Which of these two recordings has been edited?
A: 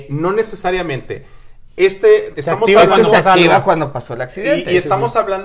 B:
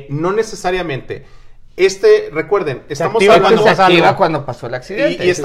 A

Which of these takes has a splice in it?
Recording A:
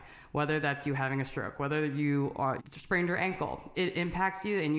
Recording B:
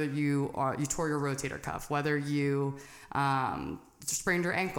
A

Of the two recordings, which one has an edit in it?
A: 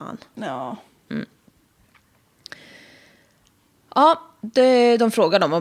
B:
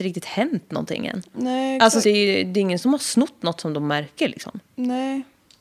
B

